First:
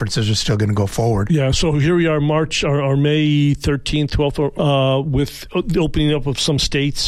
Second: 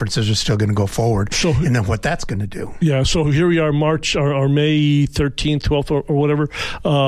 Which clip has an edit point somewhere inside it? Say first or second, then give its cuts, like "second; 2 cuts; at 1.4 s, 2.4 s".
first; 2 cuts; at 1.3 s, 4.6 s